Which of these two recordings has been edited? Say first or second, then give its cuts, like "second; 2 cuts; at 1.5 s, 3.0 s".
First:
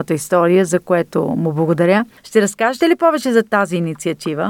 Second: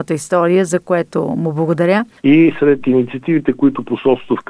second; 1 cut; at 2.2 s